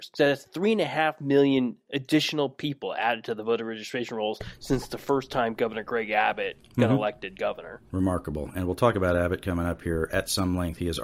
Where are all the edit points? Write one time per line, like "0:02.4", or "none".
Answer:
0:07.9
0:10.1